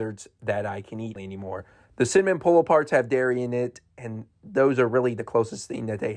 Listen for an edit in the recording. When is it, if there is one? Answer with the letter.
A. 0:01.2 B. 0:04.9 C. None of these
A